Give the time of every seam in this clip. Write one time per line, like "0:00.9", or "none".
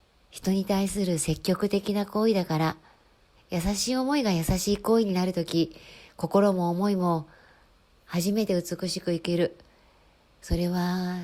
0:03.4